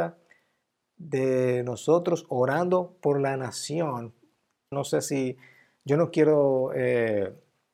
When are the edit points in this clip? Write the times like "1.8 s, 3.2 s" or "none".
4.7 s